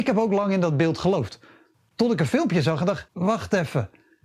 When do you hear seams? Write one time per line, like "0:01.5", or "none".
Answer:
0:03.1